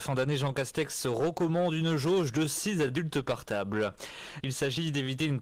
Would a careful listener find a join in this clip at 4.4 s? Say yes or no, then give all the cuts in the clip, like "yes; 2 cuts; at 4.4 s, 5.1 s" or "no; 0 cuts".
yes; 1 cut; at 4.4 s